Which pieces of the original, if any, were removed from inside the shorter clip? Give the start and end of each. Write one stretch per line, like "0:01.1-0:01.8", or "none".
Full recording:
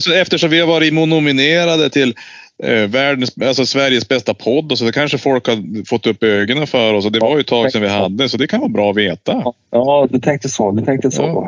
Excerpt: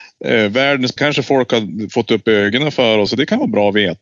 0:03.3-0:04.9
0:07.0-0:08.3